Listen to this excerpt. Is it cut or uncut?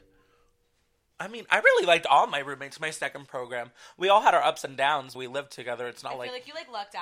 cut